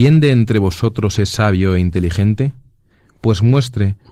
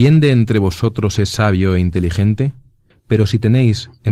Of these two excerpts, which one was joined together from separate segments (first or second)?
second